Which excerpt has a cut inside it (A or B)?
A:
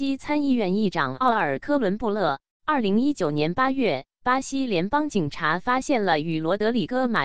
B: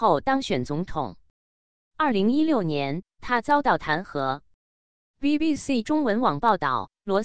A